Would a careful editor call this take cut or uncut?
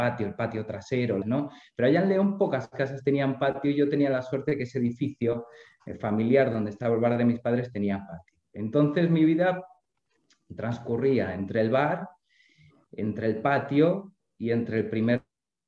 cut